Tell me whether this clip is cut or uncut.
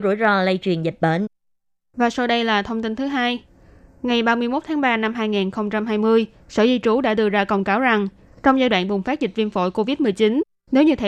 uncut